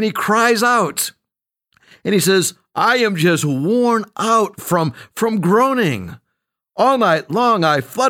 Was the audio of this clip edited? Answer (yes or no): no